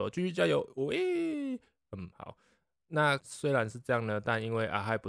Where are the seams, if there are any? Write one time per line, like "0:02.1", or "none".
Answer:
0:03.2